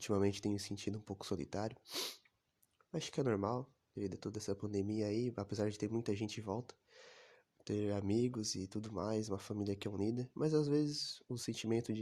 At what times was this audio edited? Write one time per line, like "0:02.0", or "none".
0:03.9